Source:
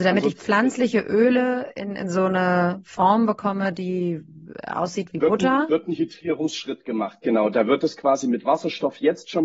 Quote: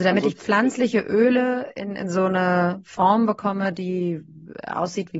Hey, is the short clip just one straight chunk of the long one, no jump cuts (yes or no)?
yes